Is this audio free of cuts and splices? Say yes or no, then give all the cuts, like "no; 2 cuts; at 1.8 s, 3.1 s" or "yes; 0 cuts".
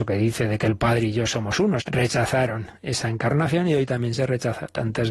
no; 1 cut; at 1.8 s